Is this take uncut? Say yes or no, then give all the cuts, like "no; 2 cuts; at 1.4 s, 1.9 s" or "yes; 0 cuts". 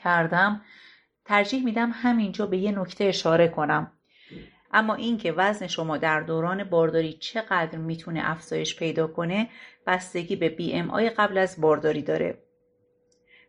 no; 1 cut; at 4.6 s